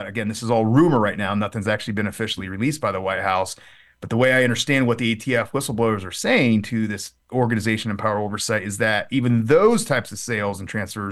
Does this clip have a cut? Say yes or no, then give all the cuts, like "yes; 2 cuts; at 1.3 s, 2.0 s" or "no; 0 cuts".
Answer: no; 0 cuts